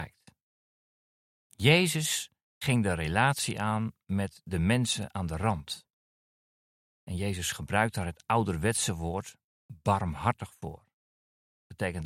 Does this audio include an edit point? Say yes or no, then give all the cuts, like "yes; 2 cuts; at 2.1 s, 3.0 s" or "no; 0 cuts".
no; 0 cuts